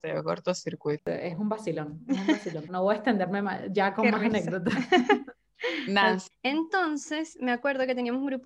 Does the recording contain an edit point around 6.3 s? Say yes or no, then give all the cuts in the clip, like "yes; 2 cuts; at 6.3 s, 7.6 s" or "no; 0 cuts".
yes; 3 cuts; at 1.0 s, 2.7 s, 6.3 s